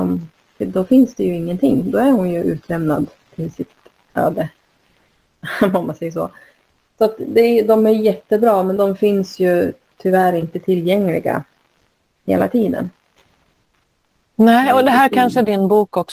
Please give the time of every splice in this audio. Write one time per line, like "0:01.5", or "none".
0:08.8

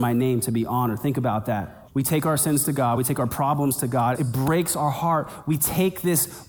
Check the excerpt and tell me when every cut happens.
0:01.9
0:03.0
0:04.1

